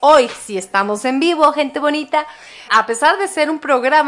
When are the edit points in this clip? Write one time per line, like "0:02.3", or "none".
0:02.7